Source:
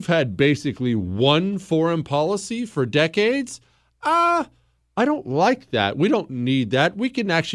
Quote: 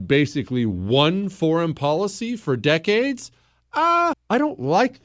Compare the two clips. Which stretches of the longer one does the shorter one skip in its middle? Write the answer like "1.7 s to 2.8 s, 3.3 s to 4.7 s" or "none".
4.4 s to 4.8 s